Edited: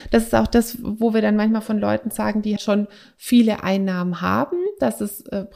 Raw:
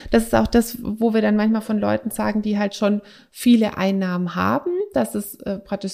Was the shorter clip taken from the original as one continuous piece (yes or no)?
no